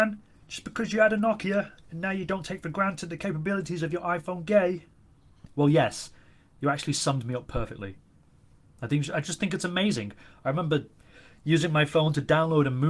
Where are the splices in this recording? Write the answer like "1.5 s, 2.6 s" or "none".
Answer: 1.8 s